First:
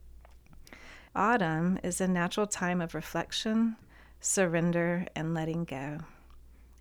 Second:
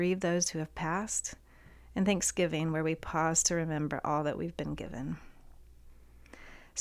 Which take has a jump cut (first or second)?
first